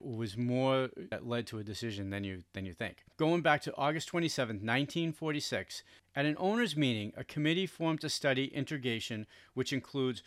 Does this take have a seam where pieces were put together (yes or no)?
yes